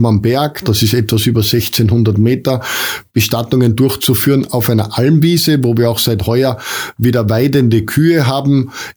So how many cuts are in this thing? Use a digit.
0